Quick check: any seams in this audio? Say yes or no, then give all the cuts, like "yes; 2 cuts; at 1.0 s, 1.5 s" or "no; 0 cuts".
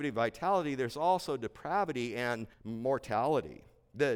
yes; 1 cut; at 2.5 s